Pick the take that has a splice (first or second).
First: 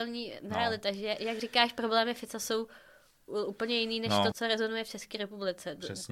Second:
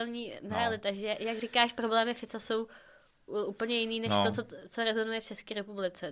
first